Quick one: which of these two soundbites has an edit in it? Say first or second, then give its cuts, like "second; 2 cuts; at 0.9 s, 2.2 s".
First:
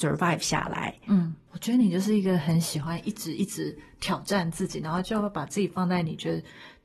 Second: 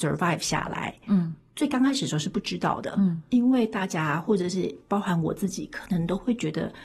first; 1 cut; at 1.5 s